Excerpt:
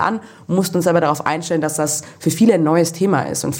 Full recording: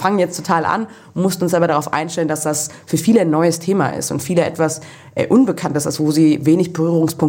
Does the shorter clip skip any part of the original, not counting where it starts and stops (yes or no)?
no